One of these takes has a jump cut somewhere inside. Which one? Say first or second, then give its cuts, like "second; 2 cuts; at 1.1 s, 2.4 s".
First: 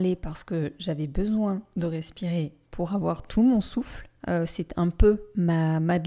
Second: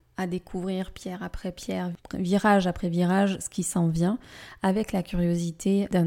first; 1 cut; at 4.2 s